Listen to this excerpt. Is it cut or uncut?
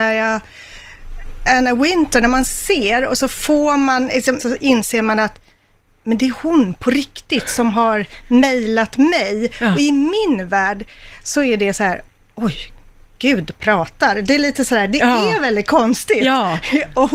cut